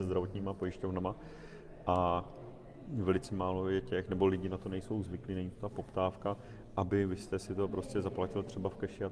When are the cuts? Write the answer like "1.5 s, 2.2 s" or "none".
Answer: none